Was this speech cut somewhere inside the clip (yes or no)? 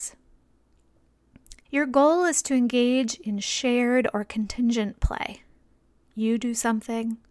yes